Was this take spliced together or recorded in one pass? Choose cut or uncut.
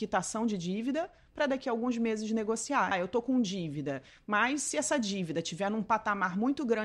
cut